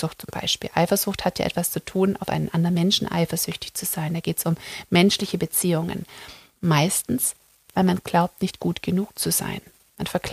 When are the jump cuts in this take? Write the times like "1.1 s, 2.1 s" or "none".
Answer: 6.5 s